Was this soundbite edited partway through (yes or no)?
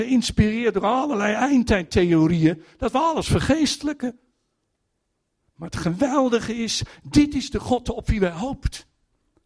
no